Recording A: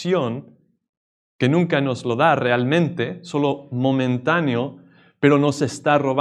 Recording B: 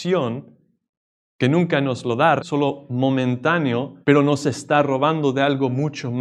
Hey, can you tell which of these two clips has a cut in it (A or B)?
B